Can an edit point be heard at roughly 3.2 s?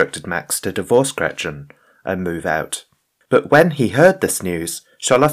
yes; 1 cut; at 3.2 s

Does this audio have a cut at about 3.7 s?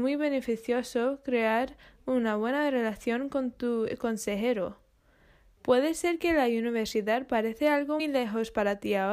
no; 2 cuts; at 5.6 s, 8.0 s

